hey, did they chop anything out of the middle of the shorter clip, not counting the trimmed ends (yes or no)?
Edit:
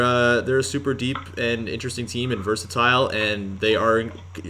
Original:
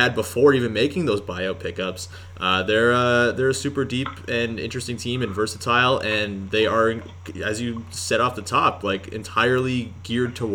no